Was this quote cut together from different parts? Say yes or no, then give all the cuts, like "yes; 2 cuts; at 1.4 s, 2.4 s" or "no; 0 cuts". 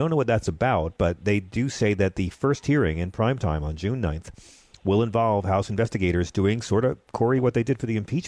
no; 0 cuts